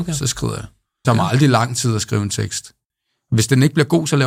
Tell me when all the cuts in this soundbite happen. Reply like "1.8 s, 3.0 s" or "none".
1.0 s